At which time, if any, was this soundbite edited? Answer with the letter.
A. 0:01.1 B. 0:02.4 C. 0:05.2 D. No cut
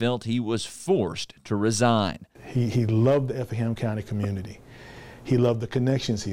B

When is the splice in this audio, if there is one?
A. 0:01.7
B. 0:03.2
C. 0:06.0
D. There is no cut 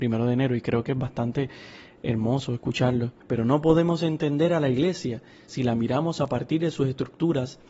B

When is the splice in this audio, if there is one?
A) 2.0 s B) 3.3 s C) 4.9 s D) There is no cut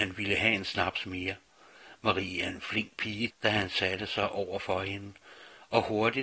B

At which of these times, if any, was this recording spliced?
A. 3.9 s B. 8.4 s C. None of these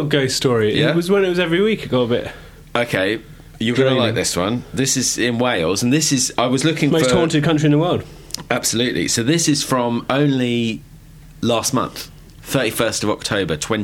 C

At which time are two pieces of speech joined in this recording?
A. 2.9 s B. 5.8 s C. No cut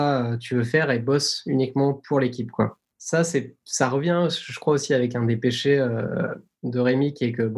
A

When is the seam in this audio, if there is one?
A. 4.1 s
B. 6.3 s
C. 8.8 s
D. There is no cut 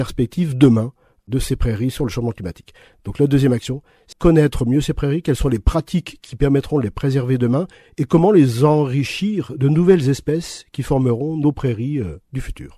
A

